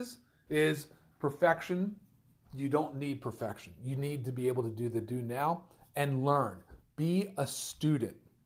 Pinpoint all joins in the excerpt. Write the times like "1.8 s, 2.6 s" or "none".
none